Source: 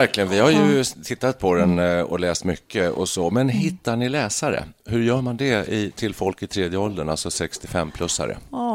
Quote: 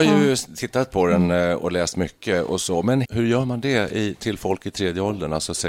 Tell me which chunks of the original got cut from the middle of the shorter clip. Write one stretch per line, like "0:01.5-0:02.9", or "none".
0:03.5-0:04.8

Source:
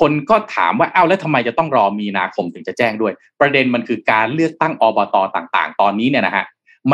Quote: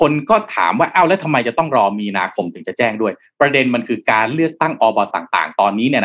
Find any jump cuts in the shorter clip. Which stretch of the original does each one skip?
0:05.1-0:05.3

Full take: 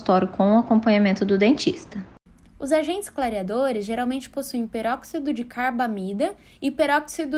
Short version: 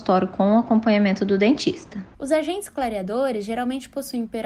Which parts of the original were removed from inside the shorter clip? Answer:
0:02.1-0:02.5

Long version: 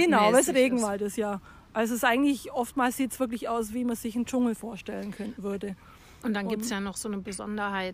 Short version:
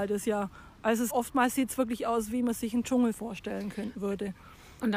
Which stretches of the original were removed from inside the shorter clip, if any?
0:02.0-0:02.5

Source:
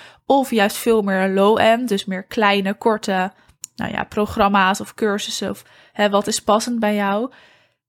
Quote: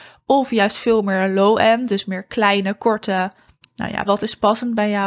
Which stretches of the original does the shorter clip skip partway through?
0:04.0-0:06.1

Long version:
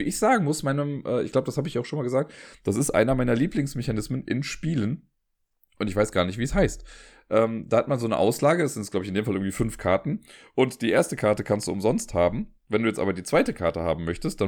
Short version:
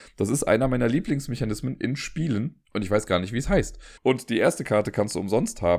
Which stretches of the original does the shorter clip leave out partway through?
0:05.1-0:05.7
0:07.0-0:10.5

